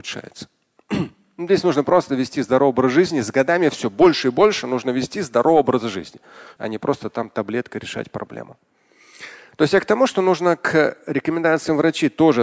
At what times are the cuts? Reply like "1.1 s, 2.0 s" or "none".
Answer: 6.6 s